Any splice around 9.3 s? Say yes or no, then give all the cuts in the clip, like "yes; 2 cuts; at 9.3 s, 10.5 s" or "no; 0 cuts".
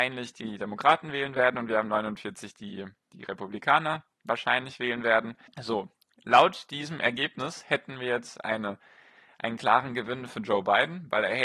no; 1 cut; at 5.5 s